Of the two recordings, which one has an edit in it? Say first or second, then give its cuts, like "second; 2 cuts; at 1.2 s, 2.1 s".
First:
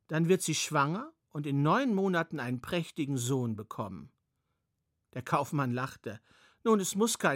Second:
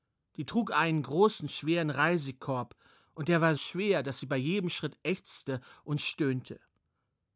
second; 1 cut; at 3.6 s